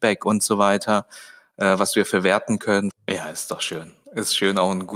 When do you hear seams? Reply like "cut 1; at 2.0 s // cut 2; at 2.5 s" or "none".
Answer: cut 1; at 2.9 s